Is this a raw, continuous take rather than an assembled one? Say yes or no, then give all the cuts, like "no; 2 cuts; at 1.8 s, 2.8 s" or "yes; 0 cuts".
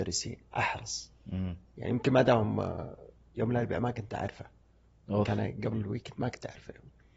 yes; 0 cuts